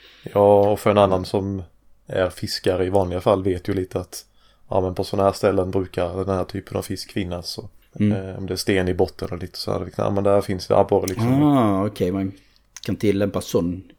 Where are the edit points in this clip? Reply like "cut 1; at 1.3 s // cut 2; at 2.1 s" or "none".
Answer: none